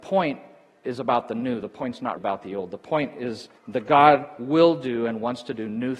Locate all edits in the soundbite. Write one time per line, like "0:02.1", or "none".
0:02.2
0:03.6